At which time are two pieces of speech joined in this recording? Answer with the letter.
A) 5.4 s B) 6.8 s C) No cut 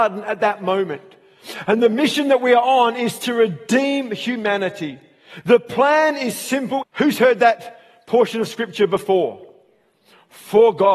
B